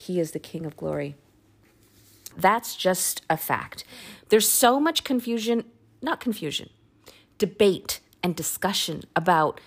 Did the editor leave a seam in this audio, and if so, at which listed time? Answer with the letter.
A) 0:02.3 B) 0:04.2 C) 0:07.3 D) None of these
A